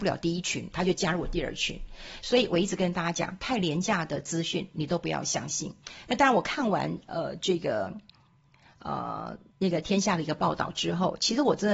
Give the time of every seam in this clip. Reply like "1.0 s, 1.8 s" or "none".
none